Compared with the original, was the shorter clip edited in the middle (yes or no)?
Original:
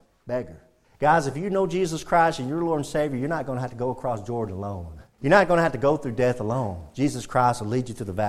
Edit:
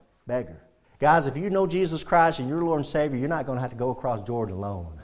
no